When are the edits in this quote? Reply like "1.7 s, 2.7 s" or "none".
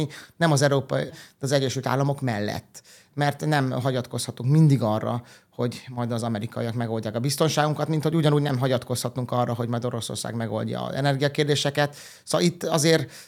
1.1 s